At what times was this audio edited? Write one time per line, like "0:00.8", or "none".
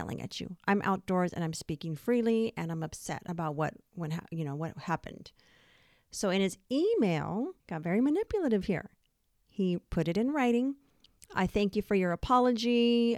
0:07.6